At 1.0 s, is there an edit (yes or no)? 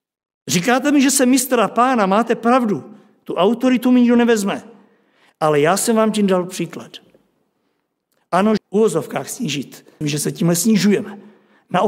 no